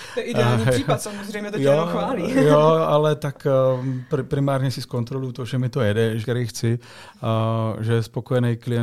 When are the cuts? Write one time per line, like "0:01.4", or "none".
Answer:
0:06.2

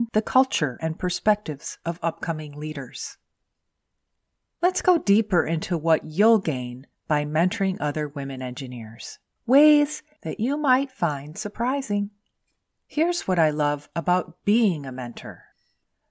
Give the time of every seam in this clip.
0:09.4
0:12.8

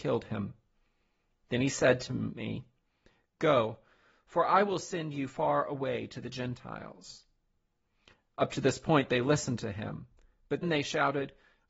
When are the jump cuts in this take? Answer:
0:10.6

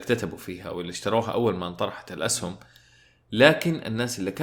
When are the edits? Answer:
none

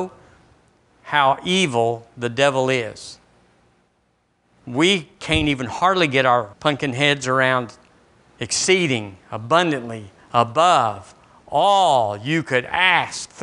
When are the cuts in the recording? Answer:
0:06.5

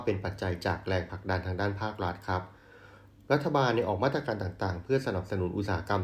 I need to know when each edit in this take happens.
none

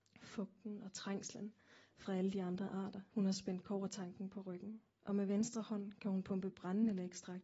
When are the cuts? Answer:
0:03.1
0:04.9

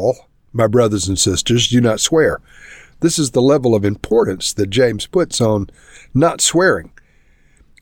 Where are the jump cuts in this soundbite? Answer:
0:02.9

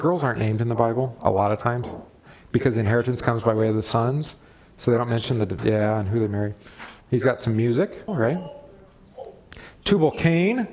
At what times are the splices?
0:05.6
0:07.0
0:08.1

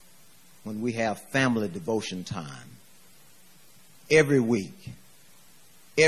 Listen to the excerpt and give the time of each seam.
none

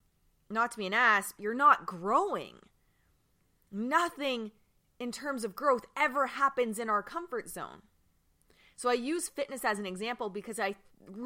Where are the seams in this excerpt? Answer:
0:01.4

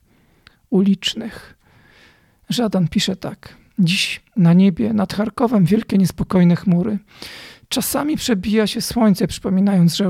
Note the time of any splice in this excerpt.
none

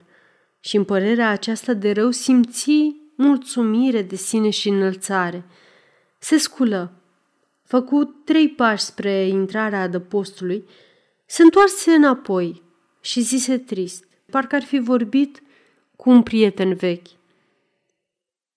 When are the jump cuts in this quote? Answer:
0:14.3

